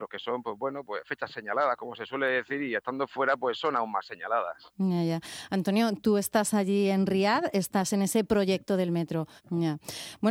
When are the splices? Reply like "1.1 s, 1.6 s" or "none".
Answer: 9.4 s